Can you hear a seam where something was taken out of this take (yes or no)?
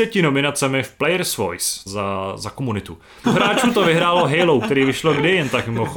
yes